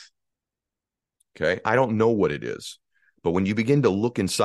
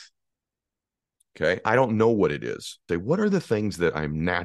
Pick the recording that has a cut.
second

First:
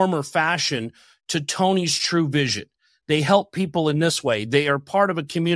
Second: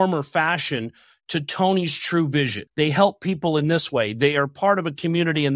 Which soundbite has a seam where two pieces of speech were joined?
second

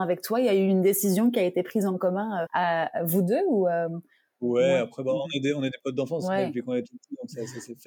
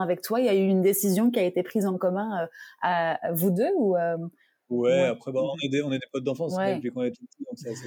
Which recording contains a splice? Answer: first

